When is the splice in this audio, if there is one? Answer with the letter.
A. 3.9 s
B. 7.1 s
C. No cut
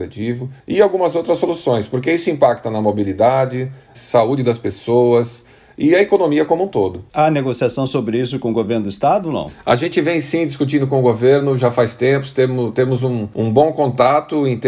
A